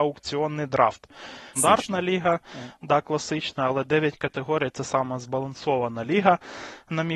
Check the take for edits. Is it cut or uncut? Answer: cut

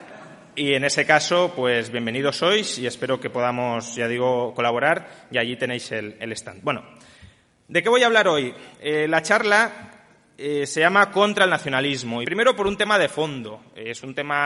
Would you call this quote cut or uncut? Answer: cut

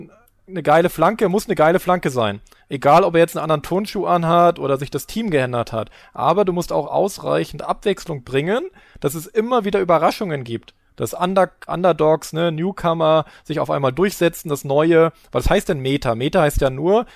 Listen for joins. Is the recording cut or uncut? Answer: cut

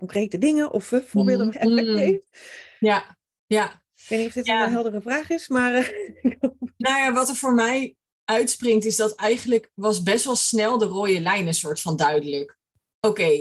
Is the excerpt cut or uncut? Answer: cut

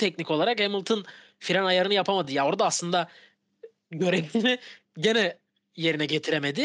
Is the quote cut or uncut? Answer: uncut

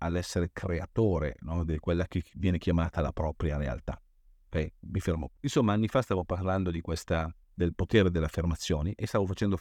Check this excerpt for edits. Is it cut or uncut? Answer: cut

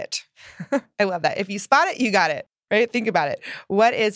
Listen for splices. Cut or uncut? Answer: uncut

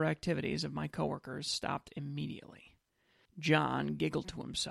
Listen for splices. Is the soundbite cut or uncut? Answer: cut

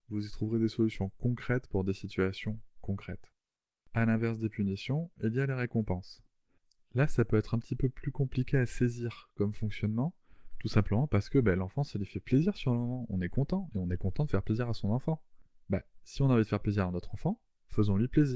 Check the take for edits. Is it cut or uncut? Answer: uncut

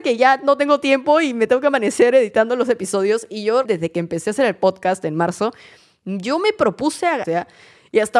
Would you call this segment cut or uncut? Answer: cut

